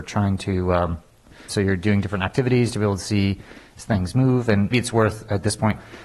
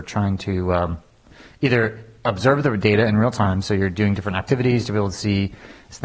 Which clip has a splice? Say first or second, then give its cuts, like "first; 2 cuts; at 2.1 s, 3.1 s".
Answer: first; 2 cuts; at 1.5 s, 4.7 s